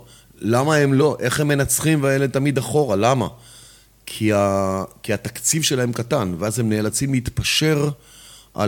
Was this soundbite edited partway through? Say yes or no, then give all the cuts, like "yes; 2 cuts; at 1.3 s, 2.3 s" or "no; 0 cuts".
no; 0 cuts